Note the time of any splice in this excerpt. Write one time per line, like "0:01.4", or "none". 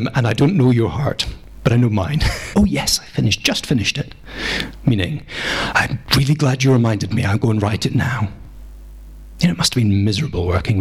0:02.5